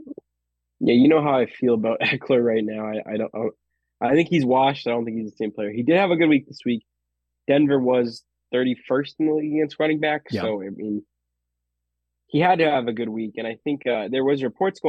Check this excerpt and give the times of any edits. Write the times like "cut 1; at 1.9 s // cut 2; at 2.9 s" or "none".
none